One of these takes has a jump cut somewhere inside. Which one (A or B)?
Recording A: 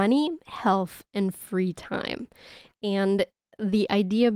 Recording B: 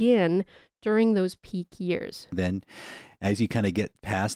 B